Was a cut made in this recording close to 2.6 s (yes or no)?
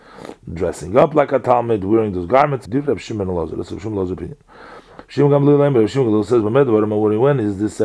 yes